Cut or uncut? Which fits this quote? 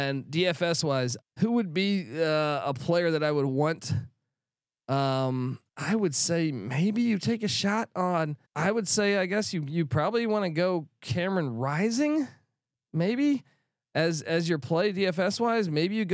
cut